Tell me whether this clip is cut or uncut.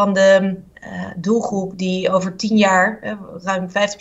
uncut